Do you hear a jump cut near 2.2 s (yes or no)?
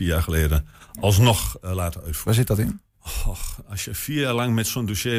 yes